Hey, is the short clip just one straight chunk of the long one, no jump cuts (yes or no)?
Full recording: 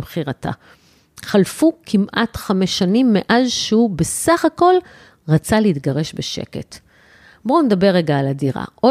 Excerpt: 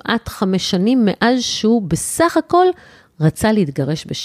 yes